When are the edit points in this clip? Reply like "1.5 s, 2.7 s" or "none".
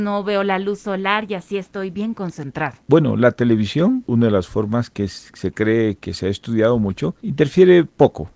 4.1 s